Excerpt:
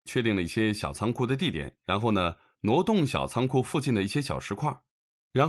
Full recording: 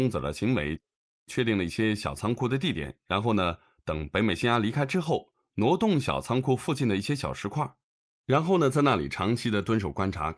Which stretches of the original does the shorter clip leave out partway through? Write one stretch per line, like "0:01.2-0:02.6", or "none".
0:03.7-0:05.5